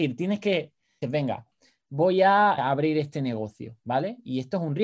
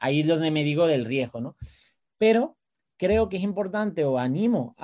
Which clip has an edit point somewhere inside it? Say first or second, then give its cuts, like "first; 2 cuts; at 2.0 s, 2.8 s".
first; 2 cuts; at 1.0 s, 2.6 s